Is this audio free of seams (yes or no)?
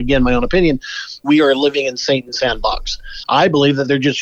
no